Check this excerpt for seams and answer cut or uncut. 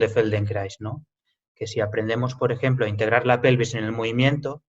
uncut